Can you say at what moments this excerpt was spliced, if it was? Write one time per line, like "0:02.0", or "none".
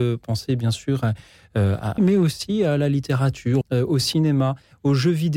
0:02.0
0:03.6